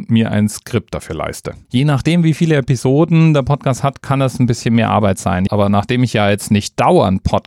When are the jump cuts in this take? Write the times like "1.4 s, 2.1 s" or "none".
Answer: 1.7 s, 5.5 s